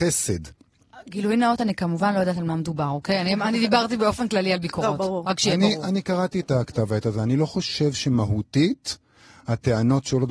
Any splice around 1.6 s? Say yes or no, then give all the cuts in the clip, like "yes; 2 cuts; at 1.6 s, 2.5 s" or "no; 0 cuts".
no; 0 cuts